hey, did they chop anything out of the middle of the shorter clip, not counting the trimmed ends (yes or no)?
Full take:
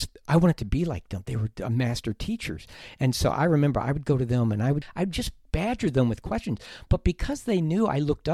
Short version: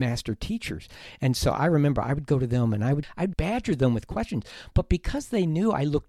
yes